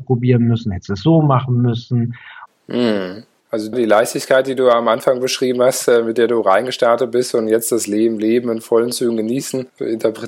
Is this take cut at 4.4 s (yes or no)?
no